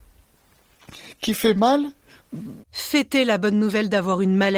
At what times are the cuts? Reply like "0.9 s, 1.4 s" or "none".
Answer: 2.6 s